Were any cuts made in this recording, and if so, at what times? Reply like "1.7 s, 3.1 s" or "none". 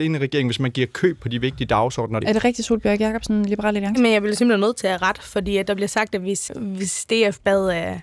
2.2 s, 6.5 s